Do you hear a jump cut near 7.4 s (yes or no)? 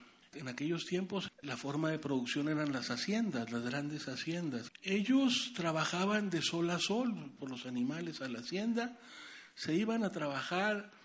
yes